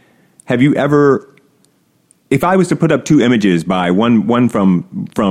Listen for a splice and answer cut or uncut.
uncut